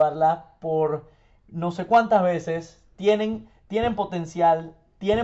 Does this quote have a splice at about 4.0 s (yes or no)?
no